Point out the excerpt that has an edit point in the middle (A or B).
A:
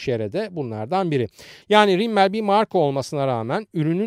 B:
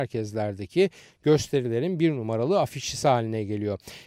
A